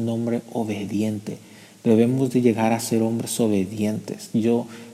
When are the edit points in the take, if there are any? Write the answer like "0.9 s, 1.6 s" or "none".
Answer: none